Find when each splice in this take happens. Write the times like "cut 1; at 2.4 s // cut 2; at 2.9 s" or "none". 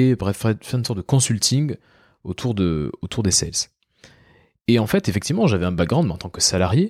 none